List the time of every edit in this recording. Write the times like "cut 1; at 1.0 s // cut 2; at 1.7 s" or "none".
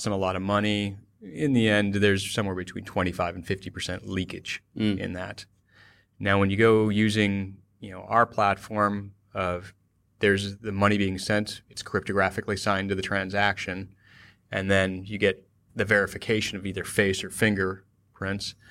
none